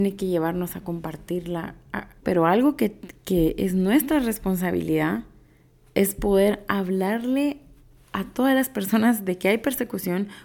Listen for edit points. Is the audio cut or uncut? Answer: cut